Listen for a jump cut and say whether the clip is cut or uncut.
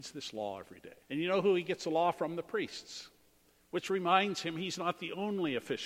cut